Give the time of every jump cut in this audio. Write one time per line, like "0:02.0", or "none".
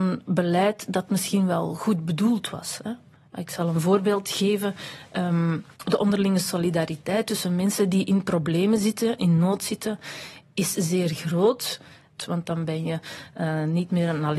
0:05.7
0:12.2